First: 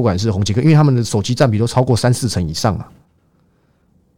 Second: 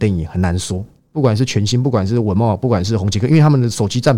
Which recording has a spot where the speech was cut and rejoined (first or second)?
second